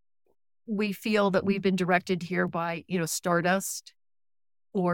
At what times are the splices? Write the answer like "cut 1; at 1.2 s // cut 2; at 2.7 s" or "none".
none